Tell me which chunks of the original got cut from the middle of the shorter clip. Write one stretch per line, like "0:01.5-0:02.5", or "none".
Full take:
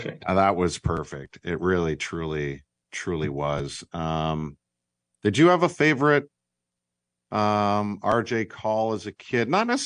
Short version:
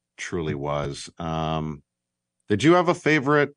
none